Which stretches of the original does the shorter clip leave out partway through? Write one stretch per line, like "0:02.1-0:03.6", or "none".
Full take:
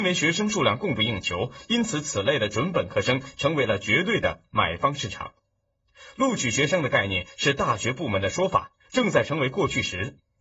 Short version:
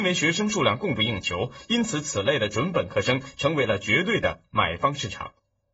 none